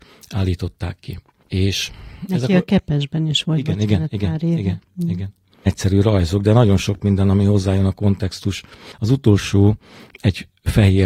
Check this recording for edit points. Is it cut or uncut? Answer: cut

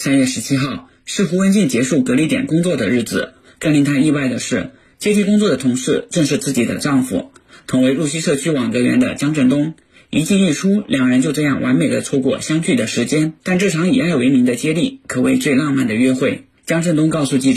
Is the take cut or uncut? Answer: uncut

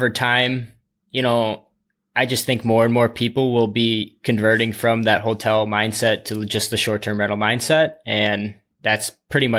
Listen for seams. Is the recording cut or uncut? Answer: uncut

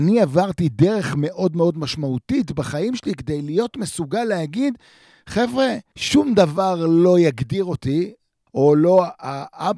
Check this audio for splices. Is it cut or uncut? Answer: cut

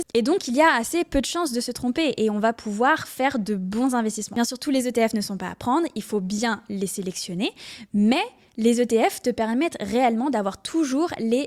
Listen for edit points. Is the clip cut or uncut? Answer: uncut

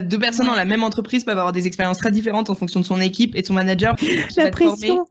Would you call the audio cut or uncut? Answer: cut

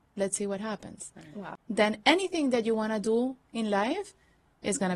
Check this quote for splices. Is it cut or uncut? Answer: cut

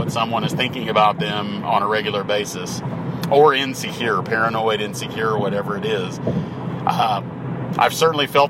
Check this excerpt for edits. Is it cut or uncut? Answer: uncut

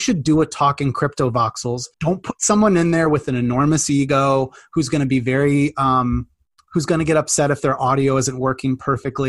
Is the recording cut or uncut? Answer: cut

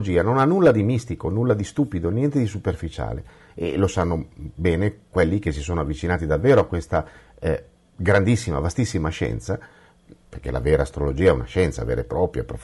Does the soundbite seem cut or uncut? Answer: uncut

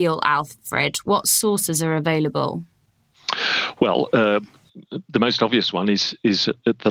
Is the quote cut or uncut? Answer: uncut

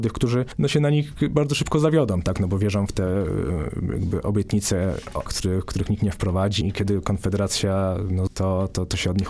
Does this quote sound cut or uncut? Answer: cut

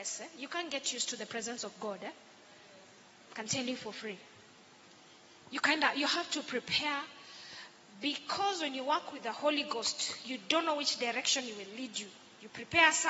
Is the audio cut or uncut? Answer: uncut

